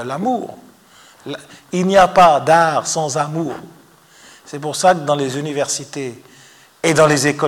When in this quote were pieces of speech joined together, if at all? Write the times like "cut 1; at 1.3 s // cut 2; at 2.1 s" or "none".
none